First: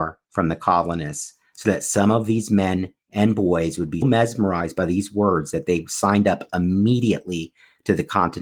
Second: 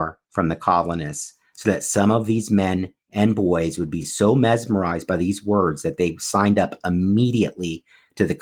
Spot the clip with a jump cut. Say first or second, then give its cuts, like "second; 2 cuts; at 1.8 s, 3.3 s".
first; 1 cut; at 4.0 s